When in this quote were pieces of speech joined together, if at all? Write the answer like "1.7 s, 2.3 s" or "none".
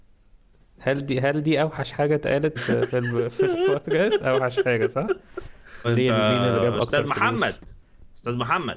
2.6 s, 5.8 s